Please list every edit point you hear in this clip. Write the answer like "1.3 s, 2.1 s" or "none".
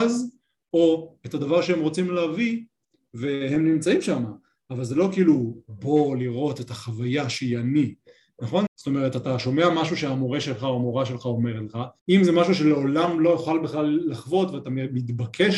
8.7 s, 12.0 s